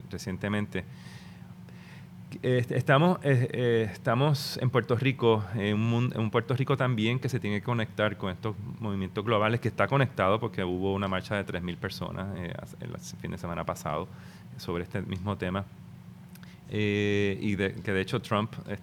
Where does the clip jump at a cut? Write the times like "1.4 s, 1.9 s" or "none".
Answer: 16.6 s